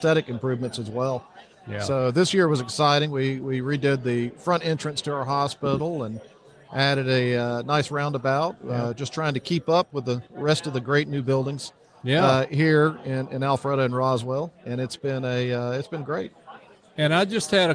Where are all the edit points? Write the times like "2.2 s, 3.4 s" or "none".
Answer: none